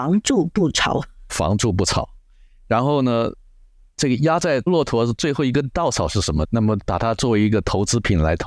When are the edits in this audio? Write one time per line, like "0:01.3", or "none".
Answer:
0:06.4